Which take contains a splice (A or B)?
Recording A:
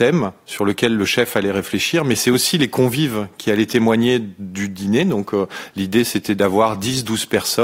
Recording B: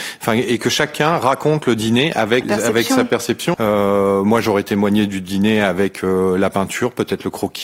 B